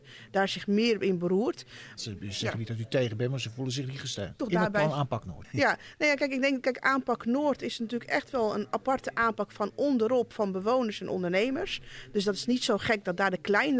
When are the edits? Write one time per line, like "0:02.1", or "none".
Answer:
0:02.0